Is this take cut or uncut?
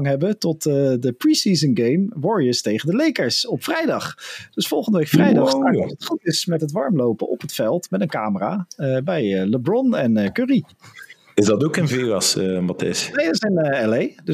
uncut